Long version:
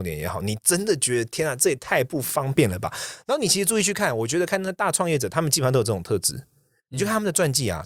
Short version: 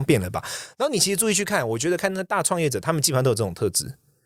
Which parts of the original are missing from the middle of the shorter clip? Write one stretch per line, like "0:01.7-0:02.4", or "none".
none

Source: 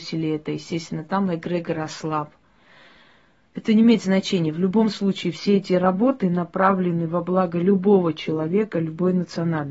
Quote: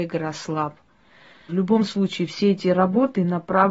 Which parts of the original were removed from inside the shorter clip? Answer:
0:03.0-0:04.5

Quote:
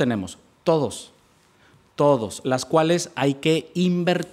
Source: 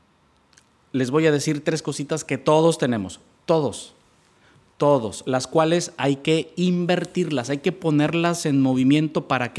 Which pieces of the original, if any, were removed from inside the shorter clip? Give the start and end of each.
none

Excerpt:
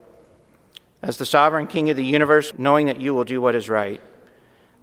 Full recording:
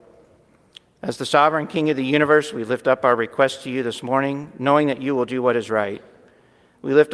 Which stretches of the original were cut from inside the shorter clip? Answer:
0:02.5-0:04.5

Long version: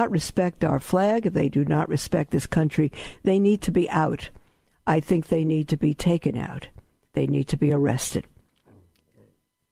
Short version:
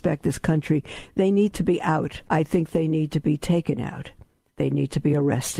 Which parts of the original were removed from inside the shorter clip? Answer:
0:04.3-0:04.8

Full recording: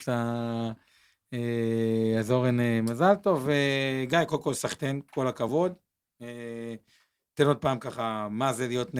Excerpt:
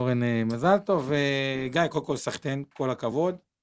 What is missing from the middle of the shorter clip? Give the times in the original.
none

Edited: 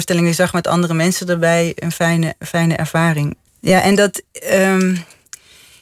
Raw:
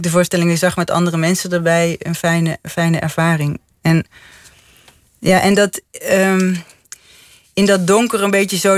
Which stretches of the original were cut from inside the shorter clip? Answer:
0:03.7-0:05.1

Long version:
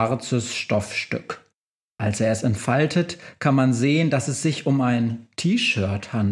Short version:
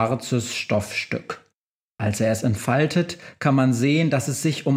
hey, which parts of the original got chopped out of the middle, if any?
none

